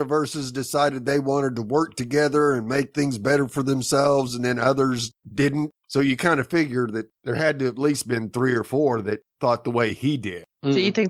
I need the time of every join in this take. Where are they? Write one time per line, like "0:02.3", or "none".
none